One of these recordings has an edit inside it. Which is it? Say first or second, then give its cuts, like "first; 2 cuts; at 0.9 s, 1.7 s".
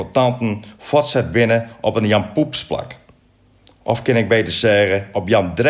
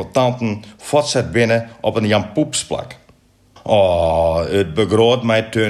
second; 1 cut; at 3.6 s